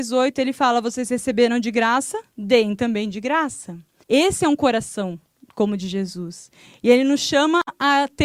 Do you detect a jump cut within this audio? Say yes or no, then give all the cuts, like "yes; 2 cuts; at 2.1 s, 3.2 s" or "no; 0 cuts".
yes; 1 cut; at 4.0 s